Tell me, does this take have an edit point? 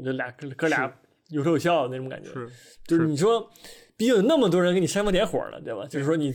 no; 0 cuts

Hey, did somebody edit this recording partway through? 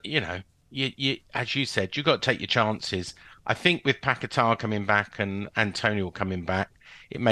no; 0 cuts

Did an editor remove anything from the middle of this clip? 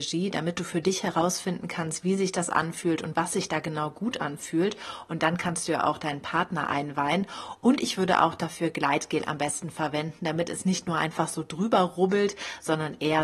no; 0 cuts

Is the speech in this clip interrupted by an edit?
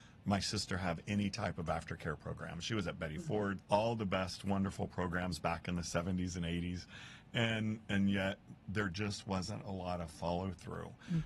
yes; 1 cut; at 3.6 s

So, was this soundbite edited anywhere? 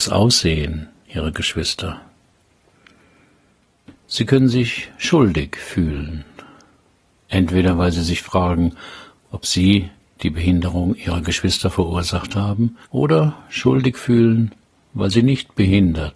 yes; 2 cuts; at 3.9 s, 12.8 s

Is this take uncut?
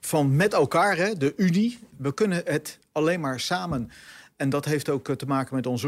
no; 1 cut; at 1.9 s

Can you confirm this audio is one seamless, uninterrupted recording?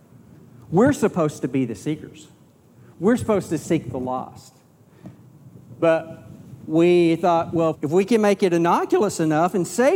no; 1 cut; at 7.7 s

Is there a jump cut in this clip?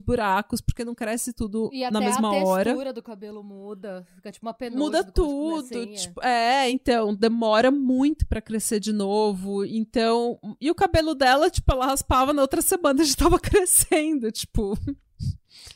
no; 0 cuts

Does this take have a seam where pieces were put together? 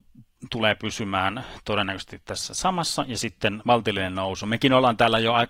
yes; 1 cut; at 3.6 s

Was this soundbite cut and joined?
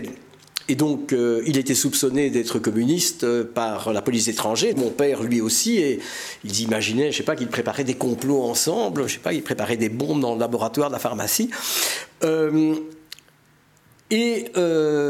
yes; 1 cut; at 4.7 s

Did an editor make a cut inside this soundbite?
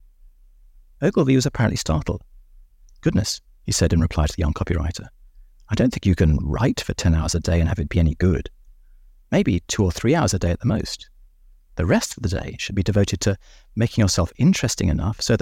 no; 0 cuts

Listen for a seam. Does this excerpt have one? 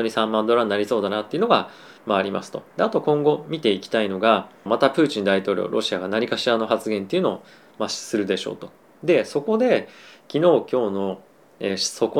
yes; 1 cut; at 4.7 s

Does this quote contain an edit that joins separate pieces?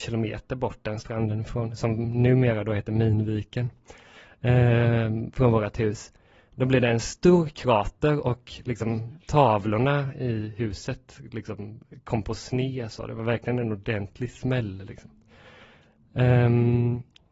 no; 0 cuts

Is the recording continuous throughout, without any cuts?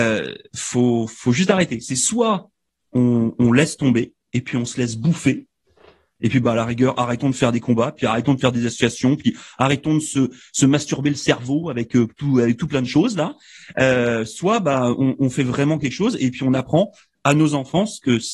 yes; 0 cuts

